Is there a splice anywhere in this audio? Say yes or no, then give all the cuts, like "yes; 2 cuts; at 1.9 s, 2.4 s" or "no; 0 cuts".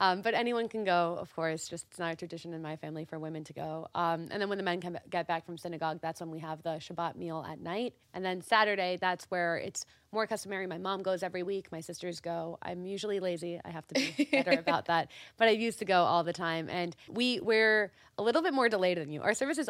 yes; 2 cuts; at 8.0 s, 17.1 s